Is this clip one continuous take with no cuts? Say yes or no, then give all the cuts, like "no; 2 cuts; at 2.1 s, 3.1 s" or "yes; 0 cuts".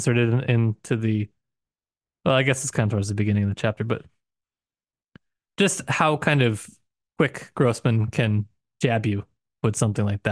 yes; 0 cuts